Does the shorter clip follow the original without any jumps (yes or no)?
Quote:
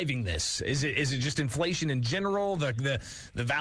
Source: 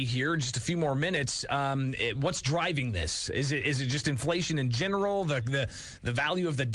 yes